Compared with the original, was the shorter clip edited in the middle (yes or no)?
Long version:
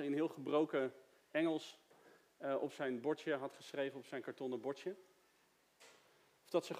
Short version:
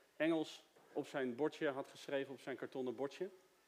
yes